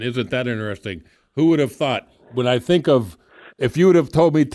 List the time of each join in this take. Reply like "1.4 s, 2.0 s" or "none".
3.5 s